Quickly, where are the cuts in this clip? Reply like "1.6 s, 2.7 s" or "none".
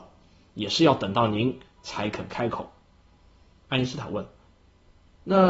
3.6 s